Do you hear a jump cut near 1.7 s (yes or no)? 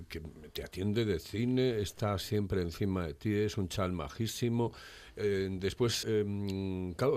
no